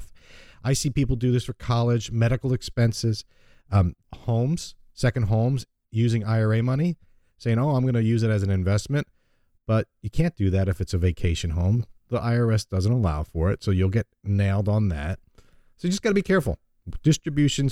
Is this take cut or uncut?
cut